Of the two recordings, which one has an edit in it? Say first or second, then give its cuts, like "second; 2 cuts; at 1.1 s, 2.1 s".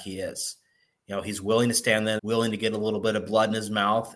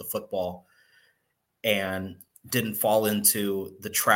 first; 1 cut; at 2.2 s